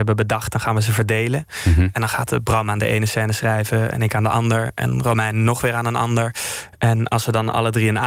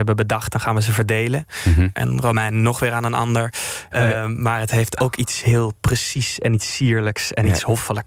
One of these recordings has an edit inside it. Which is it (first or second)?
second